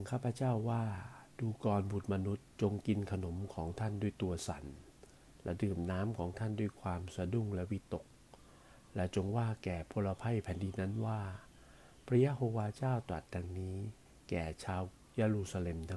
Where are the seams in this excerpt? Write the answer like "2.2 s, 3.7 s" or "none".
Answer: 2.5 s